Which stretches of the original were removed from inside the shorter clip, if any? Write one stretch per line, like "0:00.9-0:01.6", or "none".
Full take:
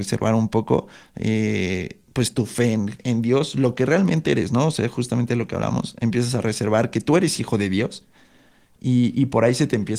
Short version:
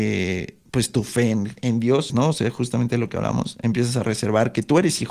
0:03.5-0:04.5